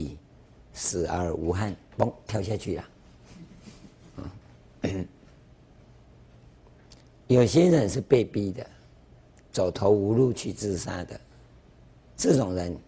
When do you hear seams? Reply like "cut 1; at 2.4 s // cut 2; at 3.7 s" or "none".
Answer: none